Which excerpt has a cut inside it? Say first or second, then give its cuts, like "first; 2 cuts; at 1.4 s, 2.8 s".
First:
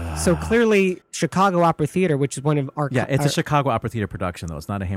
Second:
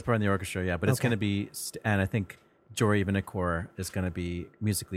first; 1 cut; at 1.0 s